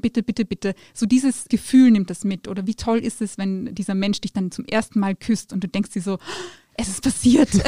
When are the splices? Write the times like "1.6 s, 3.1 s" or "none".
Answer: none